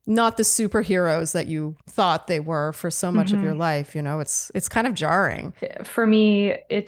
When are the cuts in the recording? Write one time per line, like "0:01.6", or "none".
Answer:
0:01.8